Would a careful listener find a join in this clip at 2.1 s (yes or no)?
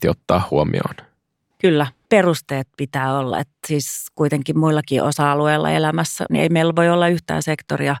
yes